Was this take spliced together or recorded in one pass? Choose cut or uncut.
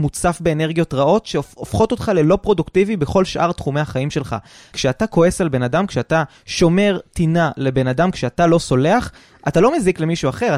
cut